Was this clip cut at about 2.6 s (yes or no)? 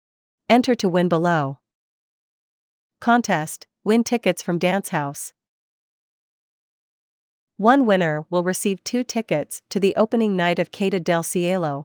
no